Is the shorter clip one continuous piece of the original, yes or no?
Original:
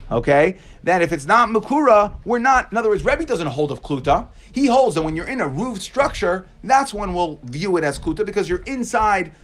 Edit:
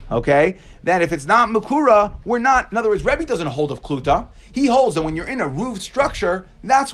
yes